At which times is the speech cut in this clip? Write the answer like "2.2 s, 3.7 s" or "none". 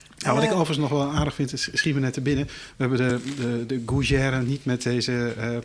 none